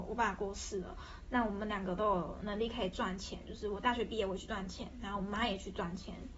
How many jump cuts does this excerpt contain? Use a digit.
1